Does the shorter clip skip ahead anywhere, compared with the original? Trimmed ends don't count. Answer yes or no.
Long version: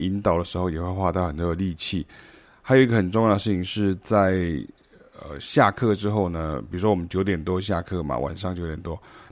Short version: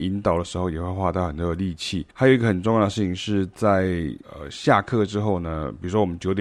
yes